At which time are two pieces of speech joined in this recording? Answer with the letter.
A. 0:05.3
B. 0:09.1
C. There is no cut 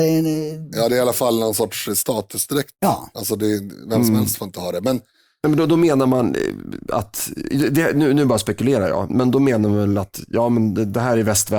B